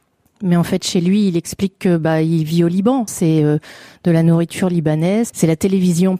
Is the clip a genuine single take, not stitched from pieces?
no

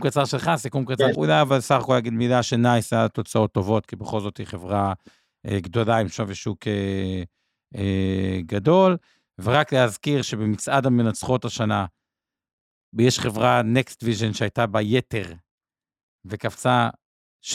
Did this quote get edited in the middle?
yes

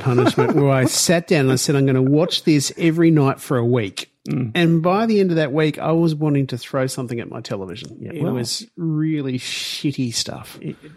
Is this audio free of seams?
yes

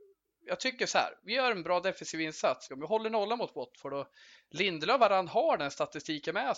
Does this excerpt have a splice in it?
yes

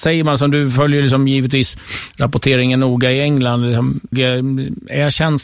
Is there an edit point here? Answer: yes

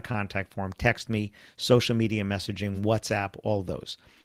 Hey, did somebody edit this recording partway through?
no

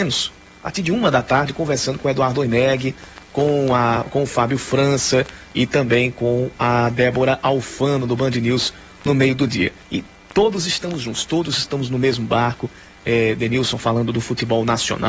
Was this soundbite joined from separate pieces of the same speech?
no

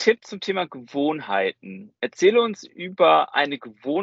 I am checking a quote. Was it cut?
no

